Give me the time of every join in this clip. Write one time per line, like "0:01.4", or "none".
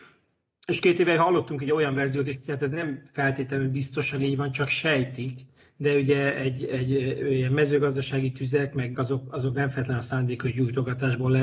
0:06.6
0:08.9